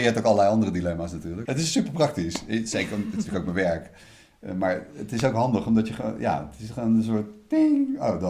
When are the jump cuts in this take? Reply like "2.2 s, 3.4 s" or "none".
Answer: 1.5 s